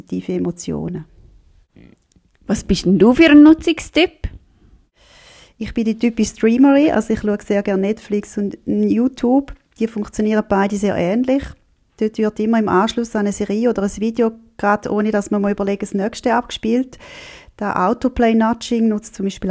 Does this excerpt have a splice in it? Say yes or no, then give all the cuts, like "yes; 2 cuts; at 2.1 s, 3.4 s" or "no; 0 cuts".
no; 0 cuts